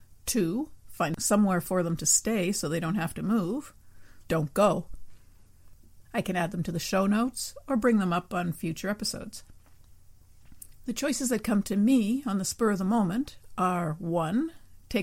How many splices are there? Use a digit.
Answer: 2